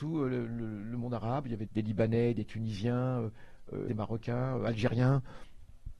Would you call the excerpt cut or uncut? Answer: cut